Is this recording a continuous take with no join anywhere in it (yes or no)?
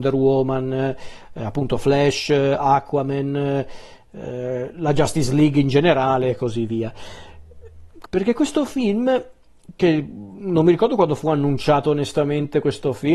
no